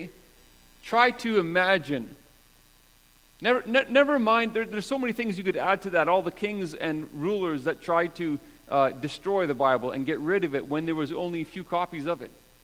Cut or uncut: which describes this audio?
uncut